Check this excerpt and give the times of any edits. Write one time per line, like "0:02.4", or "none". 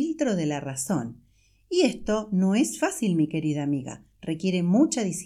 none